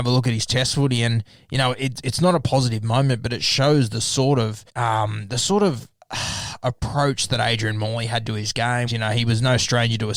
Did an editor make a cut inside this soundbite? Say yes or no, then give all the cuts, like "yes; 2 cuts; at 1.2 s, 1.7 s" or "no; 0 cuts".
yes; 2 cuts; at 4.7 s, 8.9 s